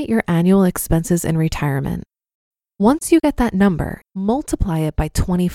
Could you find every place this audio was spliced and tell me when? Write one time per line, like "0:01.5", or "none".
0:04.0